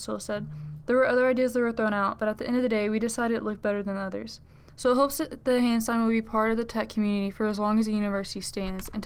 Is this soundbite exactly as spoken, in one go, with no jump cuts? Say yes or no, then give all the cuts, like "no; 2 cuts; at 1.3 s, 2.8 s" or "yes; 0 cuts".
no; 1 cut; at 4.7 s